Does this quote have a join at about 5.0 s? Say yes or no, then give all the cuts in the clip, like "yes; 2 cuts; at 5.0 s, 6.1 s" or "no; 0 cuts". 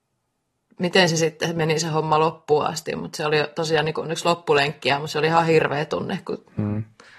no; 0 cuts